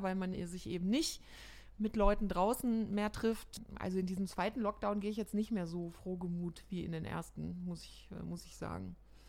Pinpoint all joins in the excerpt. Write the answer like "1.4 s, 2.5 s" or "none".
none